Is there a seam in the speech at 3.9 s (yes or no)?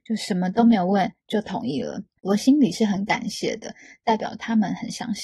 no